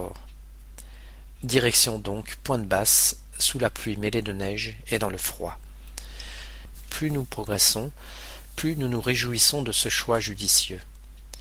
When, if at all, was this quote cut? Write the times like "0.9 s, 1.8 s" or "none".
1.4 s